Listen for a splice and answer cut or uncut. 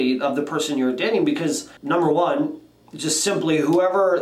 cut